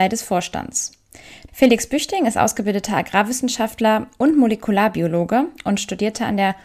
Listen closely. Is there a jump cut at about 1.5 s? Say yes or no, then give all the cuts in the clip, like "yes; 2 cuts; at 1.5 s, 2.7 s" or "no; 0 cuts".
yes; 1 cut; at 1.5 s